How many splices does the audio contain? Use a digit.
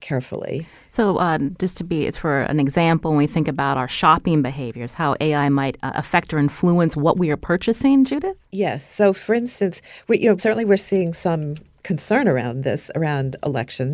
1